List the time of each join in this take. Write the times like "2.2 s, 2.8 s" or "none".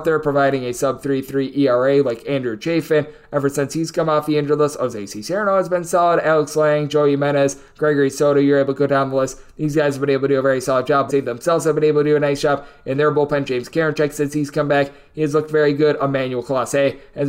11.1 s